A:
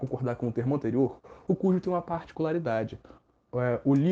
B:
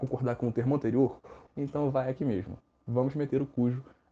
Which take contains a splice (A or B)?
B